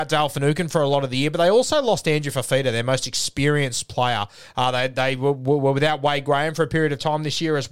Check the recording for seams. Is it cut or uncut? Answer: uncut